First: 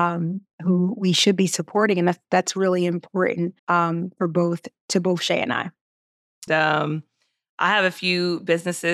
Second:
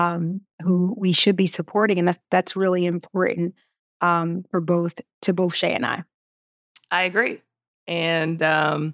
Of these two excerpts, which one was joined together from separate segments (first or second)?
first